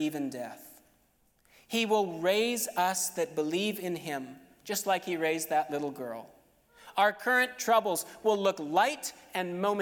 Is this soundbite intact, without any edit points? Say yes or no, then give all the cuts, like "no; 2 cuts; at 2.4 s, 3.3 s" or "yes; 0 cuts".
yes; 0 cuts